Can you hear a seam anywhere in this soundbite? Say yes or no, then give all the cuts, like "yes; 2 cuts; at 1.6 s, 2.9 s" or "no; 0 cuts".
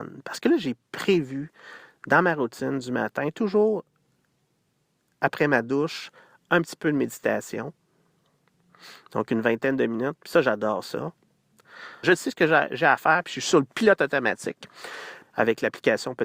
yes; 2 cuts; at 12.0 s, 15.2 s